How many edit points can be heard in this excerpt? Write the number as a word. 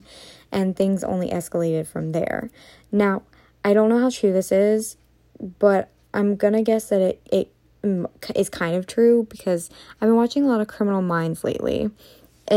zero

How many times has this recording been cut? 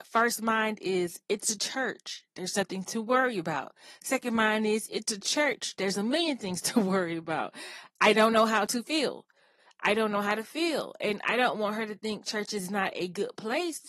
zero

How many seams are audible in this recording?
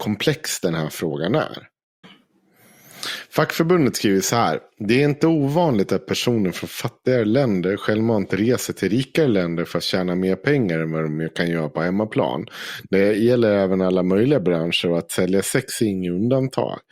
one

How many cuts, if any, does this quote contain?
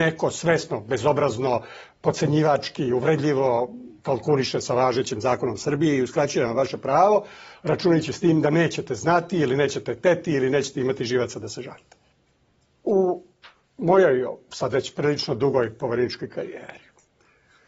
zero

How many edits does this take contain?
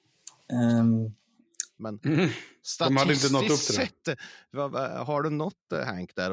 one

